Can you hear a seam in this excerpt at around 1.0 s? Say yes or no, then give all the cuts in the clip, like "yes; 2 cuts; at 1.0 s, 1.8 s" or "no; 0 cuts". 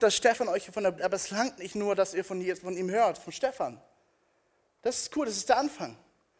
yes; 1 cut; at 1.0 s